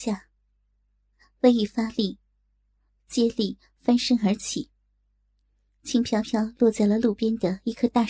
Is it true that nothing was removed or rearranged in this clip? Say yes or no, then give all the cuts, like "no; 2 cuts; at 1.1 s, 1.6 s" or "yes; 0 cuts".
yes; 0 cuts